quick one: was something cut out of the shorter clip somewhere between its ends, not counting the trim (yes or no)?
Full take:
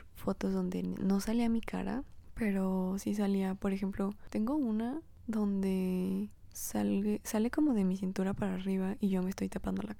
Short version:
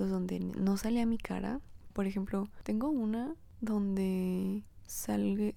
yes